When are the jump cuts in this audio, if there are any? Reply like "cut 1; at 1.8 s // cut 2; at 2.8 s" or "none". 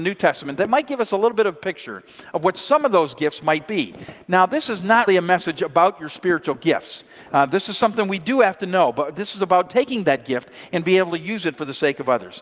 cut 1; at 5.1 s